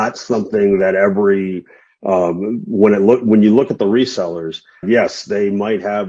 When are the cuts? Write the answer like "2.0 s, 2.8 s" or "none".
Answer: 4.8 s